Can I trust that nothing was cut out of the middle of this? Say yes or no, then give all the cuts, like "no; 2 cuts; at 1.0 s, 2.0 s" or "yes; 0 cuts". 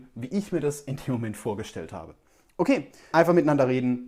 no; 1 cut; at 3.1 s